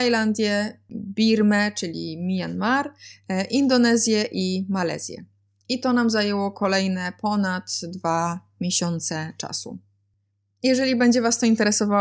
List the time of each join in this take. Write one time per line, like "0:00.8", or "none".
none